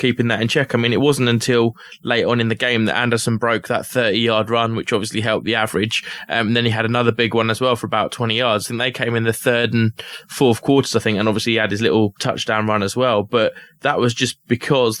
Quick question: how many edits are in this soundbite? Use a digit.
0